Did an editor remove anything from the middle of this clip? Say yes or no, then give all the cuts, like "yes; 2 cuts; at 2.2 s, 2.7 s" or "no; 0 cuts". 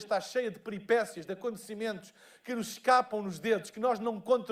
no; 0 cuts